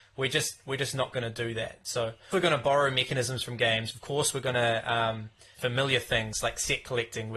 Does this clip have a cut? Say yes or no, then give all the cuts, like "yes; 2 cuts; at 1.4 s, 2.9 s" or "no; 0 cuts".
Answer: yes; 2 cuts; at 2.3 s, 5.5 s